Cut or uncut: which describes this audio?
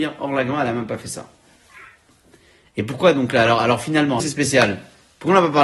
cut